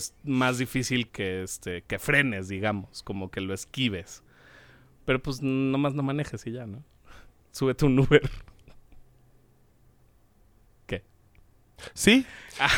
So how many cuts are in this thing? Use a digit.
1